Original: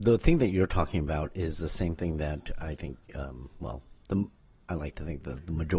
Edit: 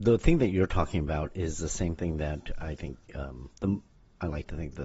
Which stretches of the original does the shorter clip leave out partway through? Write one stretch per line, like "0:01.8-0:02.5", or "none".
0:03.5-0:04.0